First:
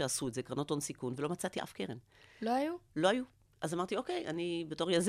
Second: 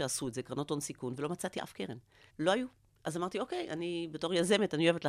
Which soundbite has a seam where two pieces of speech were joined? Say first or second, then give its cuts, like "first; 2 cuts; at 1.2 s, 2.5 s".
second; 1 cut; at 2.3 s